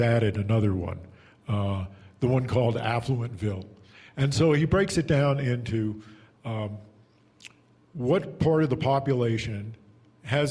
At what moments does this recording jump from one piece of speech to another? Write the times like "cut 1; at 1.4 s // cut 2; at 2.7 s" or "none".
none